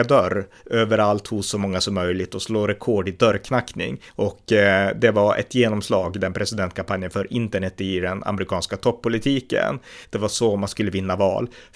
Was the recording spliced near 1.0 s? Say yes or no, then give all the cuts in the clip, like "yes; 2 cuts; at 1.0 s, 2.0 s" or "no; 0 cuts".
no; 2 cuts; at 4.1 s, 10.0 s